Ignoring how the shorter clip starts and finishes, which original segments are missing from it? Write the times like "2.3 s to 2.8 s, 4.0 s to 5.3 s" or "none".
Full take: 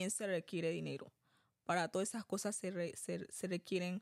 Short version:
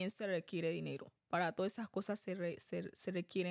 1.2 s to 1.5 s